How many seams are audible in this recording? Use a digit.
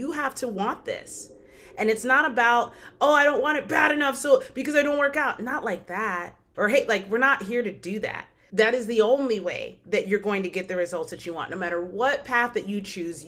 2